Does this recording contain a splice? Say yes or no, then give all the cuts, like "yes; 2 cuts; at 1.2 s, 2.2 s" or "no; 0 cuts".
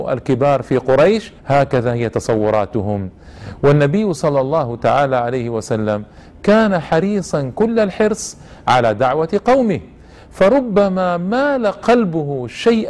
yes; 1 cut; at 1.4 s